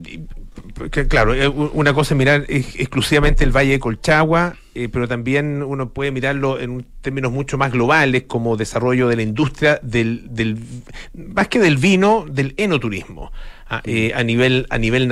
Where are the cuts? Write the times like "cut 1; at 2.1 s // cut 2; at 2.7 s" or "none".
none